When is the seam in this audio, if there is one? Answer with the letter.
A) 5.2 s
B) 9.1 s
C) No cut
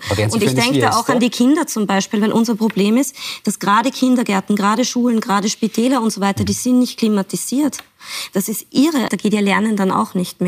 B